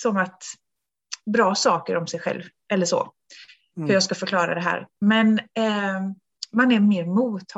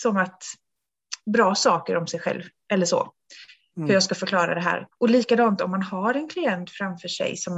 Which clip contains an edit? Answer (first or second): second